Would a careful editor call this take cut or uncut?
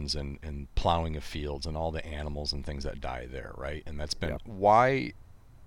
cut